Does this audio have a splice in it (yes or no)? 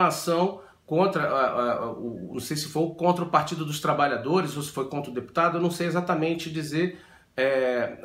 no